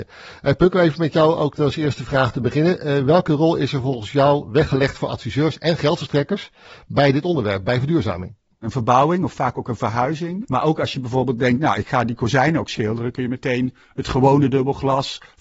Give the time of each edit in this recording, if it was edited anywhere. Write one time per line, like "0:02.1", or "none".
0:08.6
0:10.4